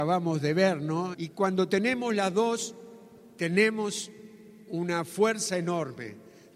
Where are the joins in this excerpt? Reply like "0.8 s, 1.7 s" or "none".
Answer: 1.1 s